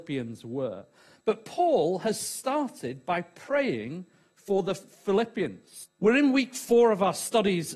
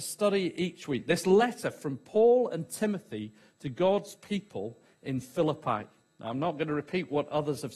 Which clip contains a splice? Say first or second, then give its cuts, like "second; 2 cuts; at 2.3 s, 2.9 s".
first; 1 cut; at 5.9 s